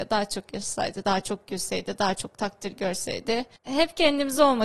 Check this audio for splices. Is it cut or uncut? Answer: cut